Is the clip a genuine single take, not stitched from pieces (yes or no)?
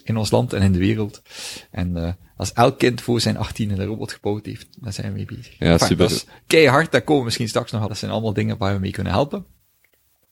no